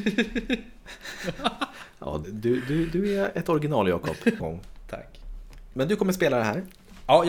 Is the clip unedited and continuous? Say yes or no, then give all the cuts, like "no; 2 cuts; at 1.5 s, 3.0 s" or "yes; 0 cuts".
no; 3 cuts; at 2.2 s, 4.4 s, 5.7 s